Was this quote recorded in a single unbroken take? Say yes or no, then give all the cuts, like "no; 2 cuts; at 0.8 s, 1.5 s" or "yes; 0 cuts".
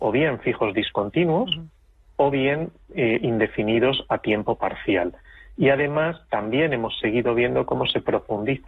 yes; 0 cuts